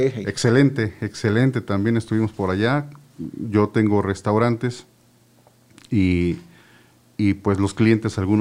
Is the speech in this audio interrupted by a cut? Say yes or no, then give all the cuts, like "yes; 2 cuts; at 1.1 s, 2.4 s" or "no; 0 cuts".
no; 0 cuts